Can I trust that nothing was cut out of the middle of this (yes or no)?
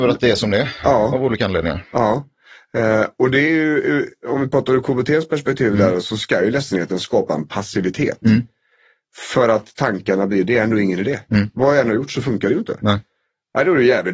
yes